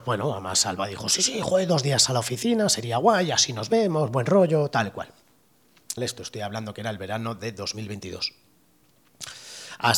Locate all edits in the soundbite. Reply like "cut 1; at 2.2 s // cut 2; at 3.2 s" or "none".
cut 1; at 6.0 s